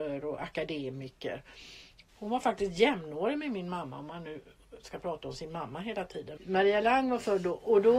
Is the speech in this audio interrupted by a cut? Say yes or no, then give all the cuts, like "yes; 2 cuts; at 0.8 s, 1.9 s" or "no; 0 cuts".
yes; 2 cuts; at 2.1 s, 6.4 s